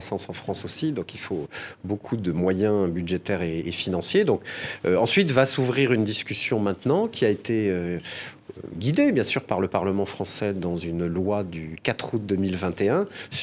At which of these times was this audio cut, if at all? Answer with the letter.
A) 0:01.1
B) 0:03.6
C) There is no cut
B